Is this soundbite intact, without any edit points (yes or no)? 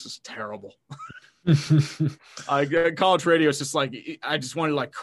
yes